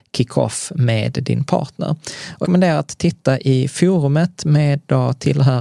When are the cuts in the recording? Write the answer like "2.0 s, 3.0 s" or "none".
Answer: 2.4 s

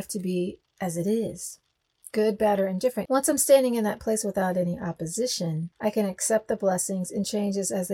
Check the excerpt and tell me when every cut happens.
3.1 s, 5.7 s

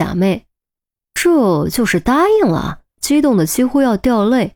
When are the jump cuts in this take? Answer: 2.9 s

